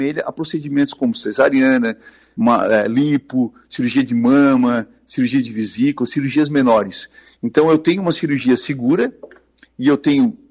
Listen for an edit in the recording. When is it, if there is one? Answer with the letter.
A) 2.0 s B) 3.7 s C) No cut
C